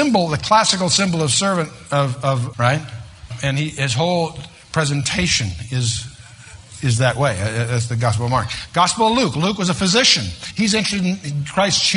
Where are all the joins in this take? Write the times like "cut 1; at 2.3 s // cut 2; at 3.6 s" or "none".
cut 1; at 2.5 s

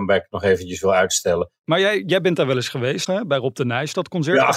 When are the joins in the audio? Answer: cut 1; at 1.6 s // cut 2; at 3.1 s

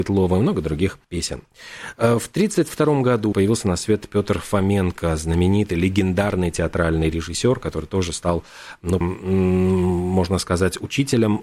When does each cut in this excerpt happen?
cut 1; at 1.0 s // cut 2; at 3.3 s // cut 3; at 9.0 s

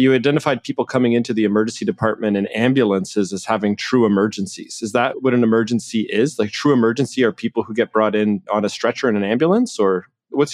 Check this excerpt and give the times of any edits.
none

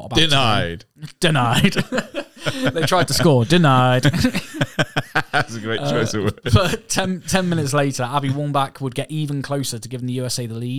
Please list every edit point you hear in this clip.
none

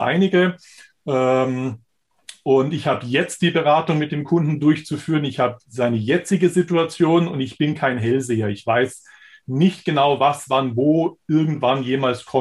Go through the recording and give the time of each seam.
none

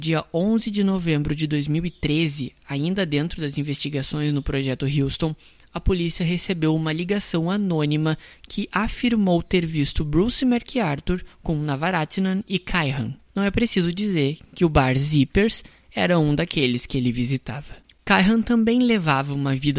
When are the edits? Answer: cut 1; at 13.3 s // cut 2; at 17.9 s

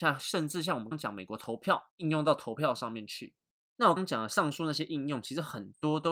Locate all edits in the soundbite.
cut 1; at 0.9 s // cut 2; at 4.0 s

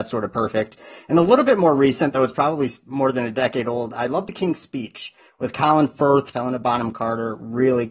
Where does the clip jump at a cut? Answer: cut 1; at 6.3 s

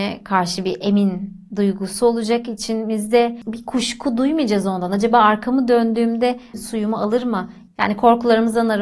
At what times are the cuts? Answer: cut 1; at 7.7 s

